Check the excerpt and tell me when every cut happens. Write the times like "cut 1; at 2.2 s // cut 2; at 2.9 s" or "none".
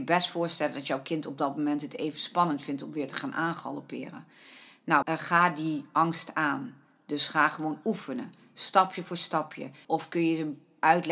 cut 1; at 5.0 s // cut 2; at 9.8 s